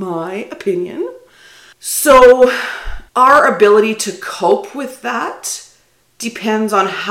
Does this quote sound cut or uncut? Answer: cut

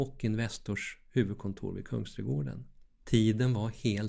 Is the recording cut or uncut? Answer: cut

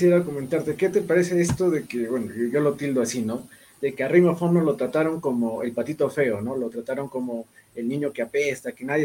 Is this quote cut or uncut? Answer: uncut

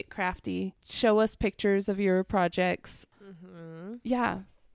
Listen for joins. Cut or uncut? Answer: uncut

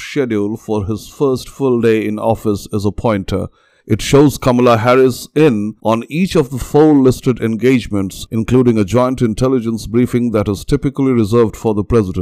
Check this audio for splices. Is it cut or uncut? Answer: uncut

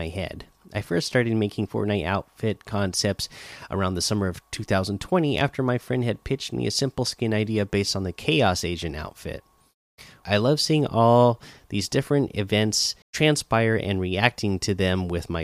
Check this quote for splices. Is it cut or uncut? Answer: cut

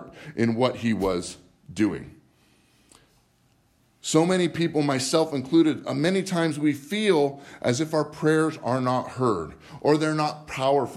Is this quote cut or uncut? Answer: uncut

